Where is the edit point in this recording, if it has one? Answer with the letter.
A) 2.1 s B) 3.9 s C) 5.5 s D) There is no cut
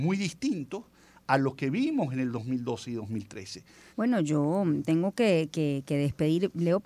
B